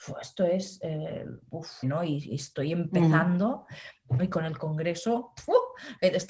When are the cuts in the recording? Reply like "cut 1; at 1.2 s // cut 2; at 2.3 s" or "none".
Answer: cut 1; at 1.8 s // cut 2; at 4.2 s